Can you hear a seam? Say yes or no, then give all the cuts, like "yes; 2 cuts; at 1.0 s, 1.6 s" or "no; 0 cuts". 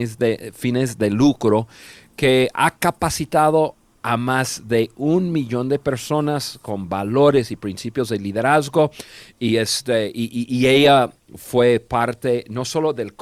no; 0 cuts